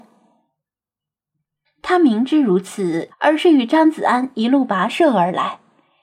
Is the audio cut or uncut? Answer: cut